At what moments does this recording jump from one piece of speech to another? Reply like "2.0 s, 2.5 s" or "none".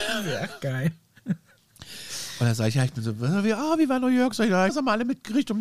4.7 s